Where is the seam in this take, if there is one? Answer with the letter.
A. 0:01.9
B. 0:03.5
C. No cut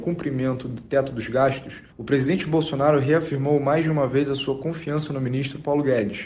A